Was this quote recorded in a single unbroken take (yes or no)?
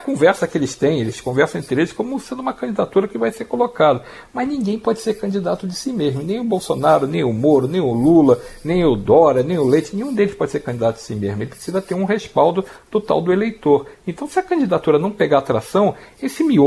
yes